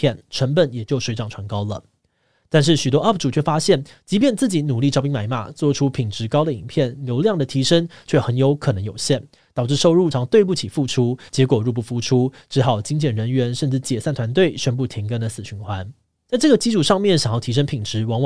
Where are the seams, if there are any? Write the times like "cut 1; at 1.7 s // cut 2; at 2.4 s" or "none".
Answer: cut 1; at 10.1 s // cut 2; at 11.3 s // cut 3; at 16.3 s